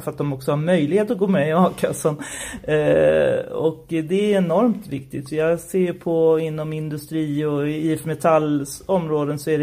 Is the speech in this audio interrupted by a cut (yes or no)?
no